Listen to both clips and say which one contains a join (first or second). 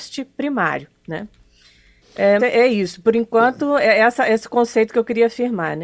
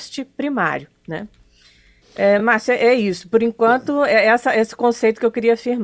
first